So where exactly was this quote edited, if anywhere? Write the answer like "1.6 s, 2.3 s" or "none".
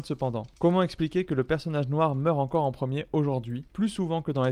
none